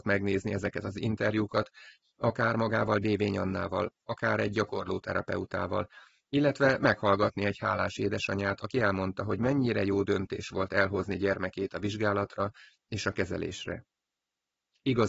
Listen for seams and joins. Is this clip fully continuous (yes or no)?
yes